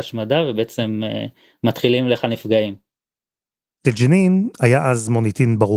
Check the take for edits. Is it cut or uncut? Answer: cut